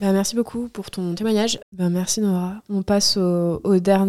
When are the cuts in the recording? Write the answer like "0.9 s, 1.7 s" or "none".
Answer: 1.6 s